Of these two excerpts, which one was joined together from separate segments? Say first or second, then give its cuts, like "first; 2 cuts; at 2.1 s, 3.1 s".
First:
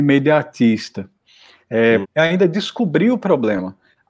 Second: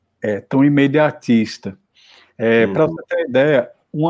first; 1 cut; at 2.0 s